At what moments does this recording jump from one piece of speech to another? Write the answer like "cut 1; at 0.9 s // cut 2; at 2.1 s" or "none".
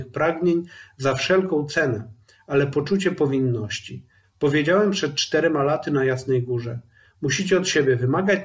cut 1; at 4.2 s